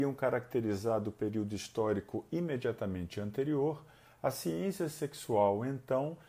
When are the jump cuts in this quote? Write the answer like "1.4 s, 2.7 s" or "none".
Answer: none